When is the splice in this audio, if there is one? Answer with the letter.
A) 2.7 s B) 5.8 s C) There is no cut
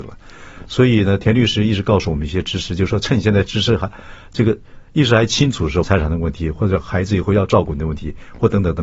B